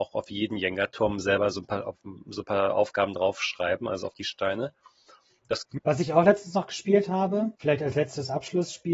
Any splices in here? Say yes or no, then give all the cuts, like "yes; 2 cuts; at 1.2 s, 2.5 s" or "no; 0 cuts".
yes; 2 cuts; at 5.8 s, 7.5 s